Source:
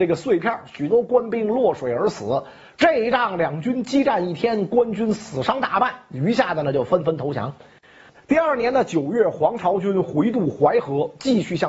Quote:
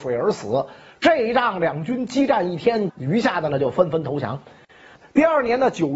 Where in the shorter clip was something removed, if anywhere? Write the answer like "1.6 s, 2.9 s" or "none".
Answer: 2.9 s